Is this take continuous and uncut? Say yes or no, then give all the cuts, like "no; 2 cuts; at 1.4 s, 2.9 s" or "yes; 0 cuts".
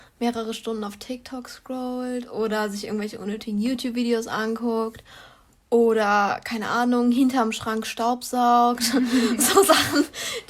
yes; 0 cuts